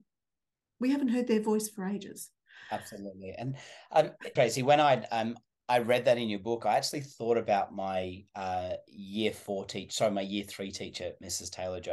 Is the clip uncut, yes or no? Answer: no